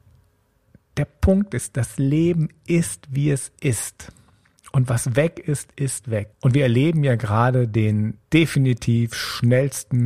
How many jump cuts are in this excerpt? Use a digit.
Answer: 2